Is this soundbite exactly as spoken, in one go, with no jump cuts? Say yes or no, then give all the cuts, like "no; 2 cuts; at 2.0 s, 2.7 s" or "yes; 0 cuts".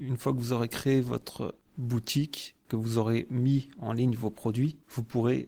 yes; 0 cuts